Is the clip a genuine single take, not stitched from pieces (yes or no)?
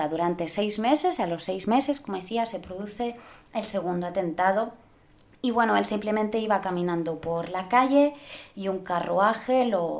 yes